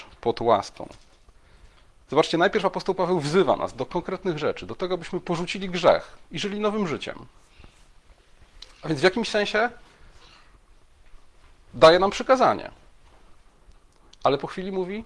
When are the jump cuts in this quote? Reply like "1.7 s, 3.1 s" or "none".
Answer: none